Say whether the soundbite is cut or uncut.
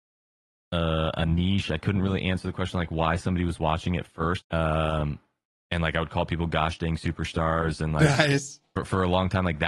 cut